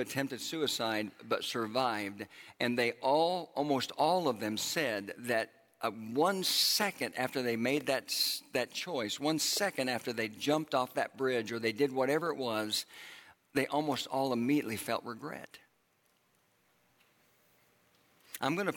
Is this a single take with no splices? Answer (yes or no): yes